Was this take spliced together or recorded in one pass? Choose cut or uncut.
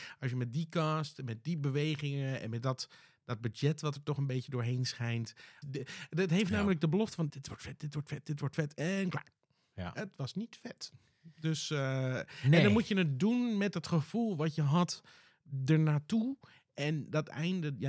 cut